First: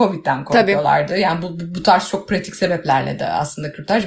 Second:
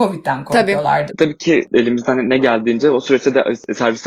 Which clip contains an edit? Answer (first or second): second